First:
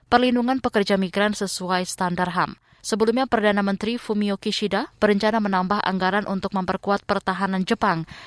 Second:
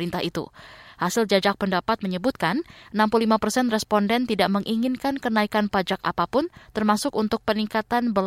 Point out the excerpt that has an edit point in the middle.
first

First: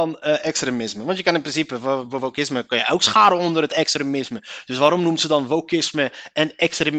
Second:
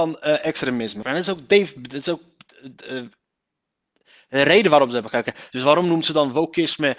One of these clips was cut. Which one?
second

